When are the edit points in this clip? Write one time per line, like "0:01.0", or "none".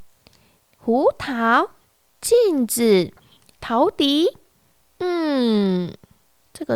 0:03.6

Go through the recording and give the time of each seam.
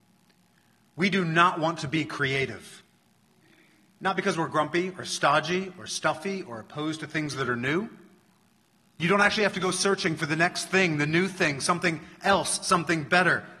0:08.8

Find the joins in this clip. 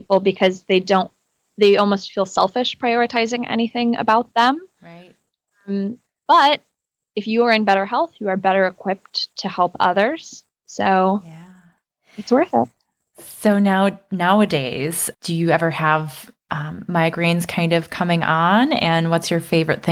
0:15.1

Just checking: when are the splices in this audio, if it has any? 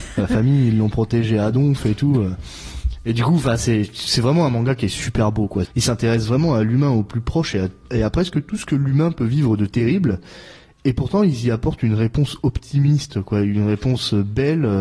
0:05.7

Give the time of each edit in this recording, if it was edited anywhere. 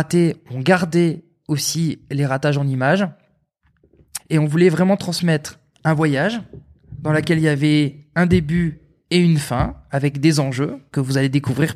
0:04.2

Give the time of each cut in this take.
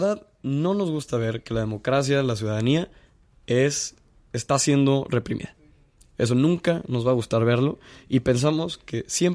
none

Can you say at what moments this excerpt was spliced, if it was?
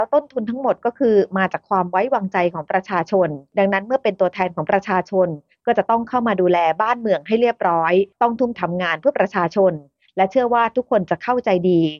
0:08.5

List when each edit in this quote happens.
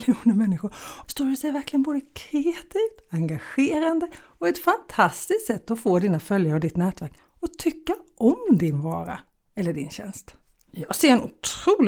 0:01.0

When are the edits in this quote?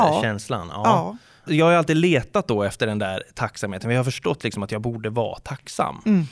0:01.5

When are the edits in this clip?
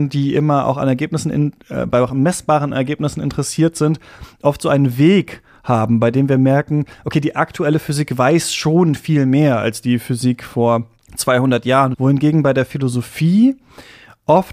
0:11.9

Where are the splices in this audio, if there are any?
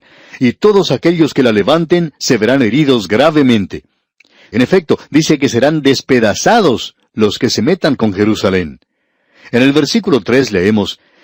0:04.5

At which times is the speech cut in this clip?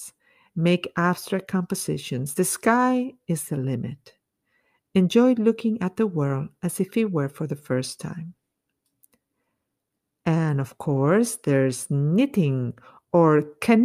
none

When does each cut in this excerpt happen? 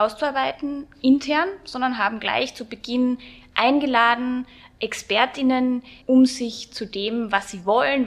0:06.0

